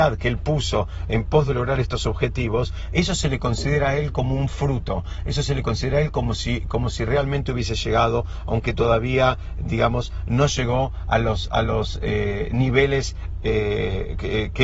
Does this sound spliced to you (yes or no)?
no